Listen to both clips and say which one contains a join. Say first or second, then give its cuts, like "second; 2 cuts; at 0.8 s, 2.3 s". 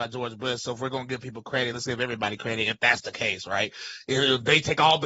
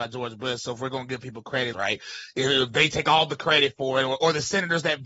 second; 1 cut; at 1.7 s